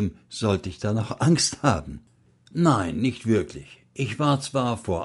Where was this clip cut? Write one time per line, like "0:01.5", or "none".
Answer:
0:02.4